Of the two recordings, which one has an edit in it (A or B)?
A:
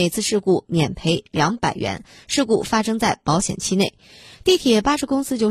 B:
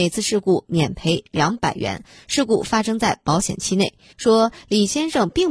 B